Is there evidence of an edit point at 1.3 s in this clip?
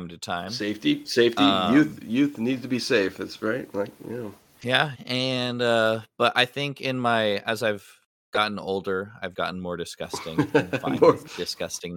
no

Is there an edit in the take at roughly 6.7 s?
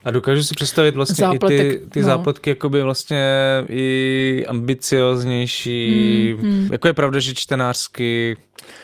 yes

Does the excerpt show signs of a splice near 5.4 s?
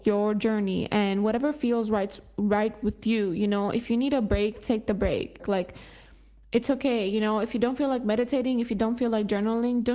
yes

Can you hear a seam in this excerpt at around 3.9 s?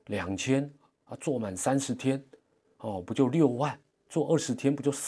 no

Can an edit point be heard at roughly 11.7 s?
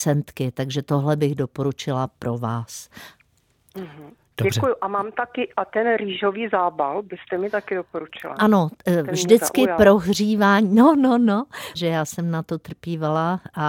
yes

